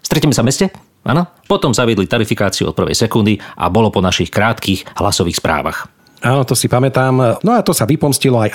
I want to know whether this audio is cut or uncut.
cut